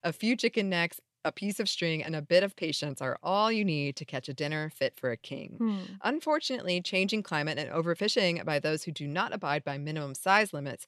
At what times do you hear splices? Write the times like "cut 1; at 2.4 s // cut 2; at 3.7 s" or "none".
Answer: cut 1; at 2.0 s